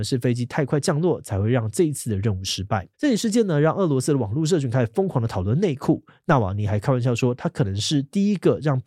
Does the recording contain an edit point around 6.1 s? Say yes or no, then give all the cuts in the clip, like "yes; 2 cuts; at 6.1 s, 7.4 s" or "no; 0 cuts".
no; 1 cut; at 2.9 s